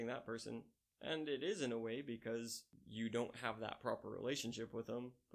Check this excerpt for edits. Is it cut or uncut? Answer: uncut